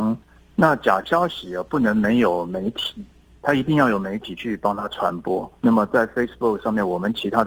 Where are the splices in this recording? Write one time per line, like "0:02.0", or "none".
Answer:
0:05.6